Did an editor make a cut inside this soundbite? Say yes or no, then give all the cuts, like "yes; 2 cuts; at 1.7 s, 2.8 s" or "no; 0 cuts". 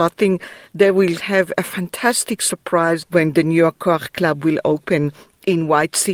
yes; 1 cut; at 3.0 s